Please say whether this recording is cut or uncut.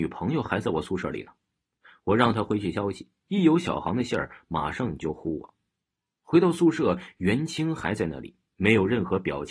uncut